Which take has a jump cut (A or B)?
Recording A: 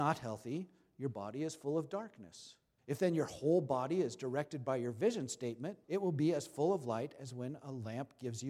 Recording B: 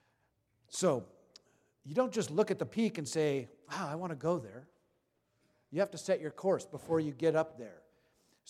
A